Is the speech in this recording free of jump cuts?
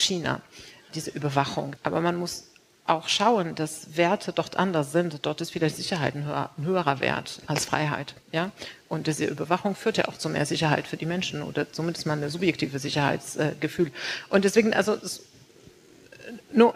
no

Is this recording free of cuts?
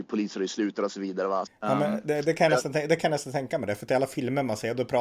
no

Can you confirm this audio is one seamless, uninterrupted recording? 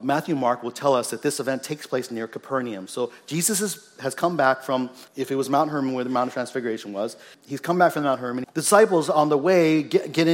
no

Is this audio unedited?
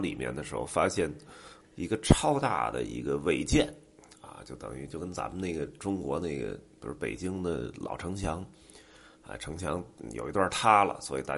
no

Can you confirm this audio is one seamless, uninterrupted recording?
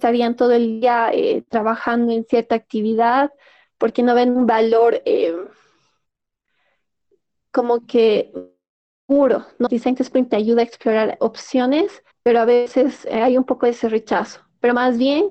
no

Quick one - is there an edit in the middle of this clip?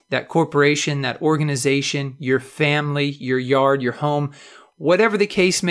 no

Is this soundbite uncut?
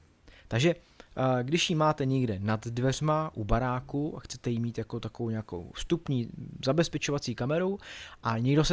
yes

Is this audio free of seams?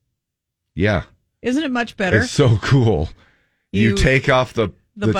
yes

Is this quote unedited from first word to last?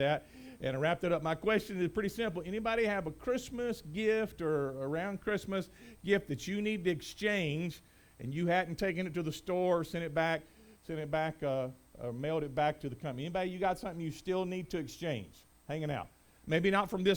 yes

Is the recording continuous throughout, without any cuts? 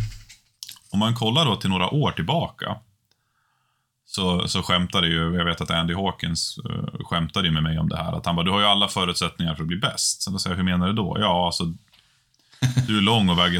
yes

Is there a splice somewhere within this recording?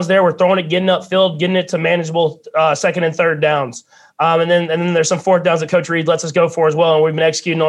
no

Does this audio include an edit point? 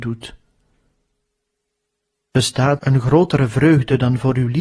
yes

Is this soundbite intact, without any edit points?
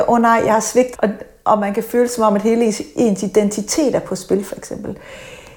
no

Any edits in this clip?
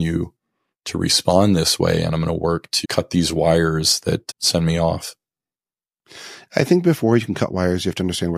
yes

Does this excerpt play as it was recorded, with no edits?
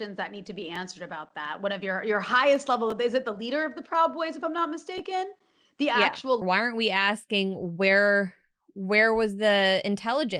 no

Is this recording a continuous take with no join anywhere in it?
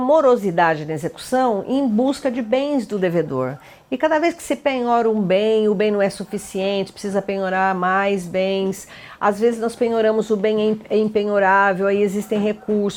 yes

